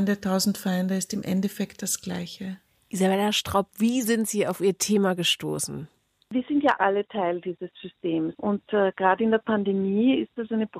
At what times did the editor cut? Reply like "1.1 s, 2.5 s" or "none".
6.8 s, 8.3 s